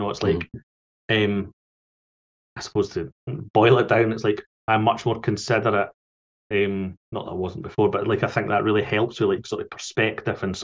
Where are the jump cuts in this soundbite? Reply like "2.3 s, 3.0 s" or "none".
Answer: none